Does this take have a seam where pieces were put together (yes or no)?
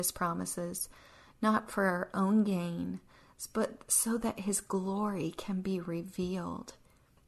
no